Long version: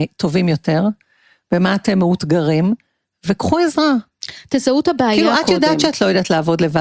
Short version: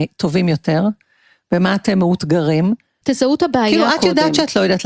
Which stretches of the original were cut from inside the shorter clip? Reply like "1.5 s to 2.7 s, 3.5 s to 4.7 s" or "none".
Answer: 3.0 s to 4.5 s